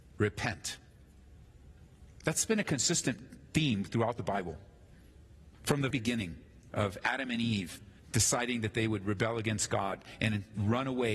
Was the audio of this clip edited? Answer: yes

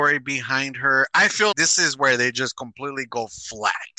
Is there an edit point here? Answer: yes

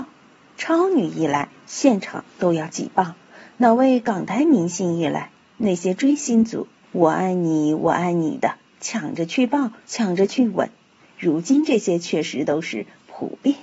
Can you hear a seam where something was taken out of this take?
yes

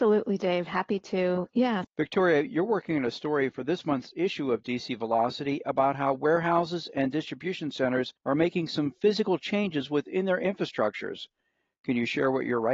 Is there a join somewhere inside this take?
yes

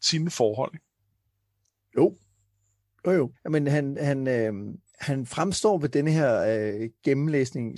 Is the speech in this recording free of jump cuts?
no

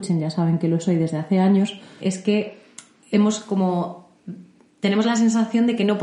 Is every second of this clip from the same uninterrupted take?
no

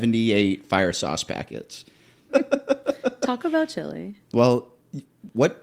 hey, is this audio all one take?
no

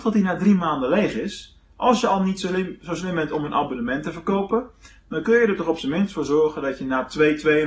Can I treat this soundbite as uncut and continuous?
yes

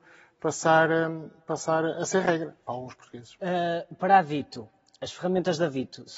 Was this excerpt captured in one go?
yes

